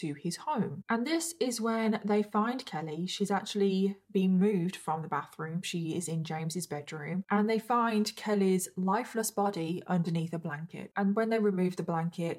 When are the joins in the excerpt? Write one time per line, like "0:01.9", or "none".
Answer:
none